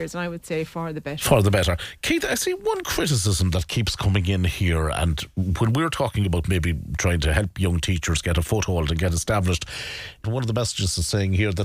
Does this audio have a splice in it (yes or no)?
yes